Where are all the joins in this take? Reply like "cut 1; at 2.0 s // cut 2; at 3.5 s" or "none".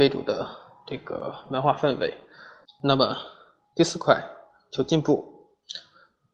cut 1; at 2.6 s